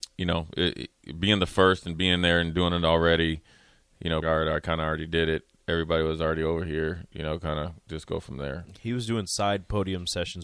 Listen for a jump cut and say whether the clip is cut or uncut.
cut